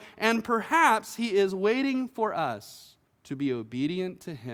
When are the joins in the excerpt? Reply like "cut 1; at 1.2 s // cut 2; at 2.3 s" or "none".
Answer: cut 1; at 3.1 s

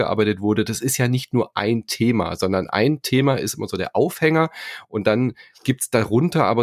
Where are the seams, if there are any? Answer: none

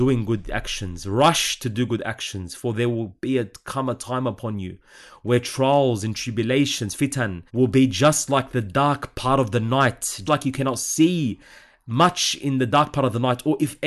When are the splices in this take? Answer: cut 1; at 7.5 s // cut 2; at 10.3 s

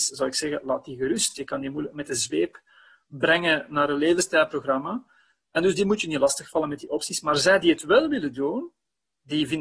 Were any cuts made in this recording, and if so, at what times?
none

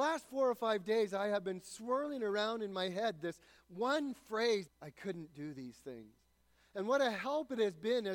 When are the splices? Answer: cut 1; at 4.7 s

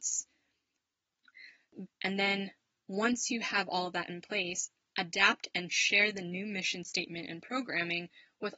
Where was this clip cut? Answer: cut 1; at 1.9 s

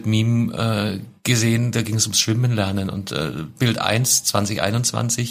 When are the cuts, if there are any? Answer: none

